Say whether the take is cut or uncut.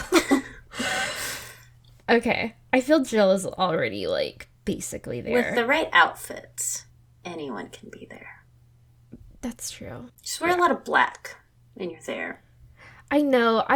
cut